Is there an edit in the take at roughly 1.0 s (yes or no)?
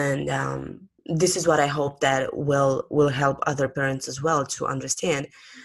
yes